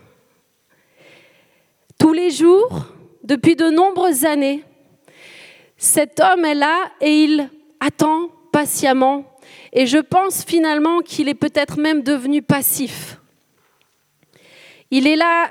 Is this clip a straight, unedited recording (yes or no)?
yes